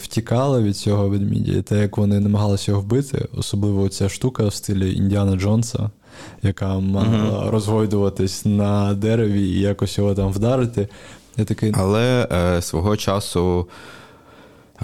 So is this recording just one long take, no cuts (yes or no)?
no